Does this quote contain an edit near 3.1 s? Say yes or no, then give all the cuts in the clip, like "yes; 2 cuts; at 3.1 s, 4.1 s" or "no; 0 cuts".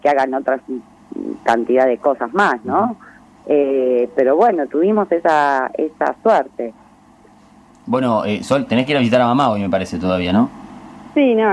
no; 0 cuts